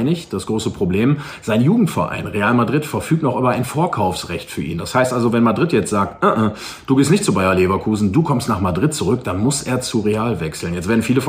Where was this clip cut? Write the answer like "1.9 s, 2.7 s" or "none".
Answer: none